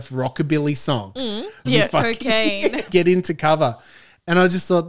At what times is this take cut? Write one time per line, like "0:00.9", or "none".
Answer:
0:01.6
0:02.9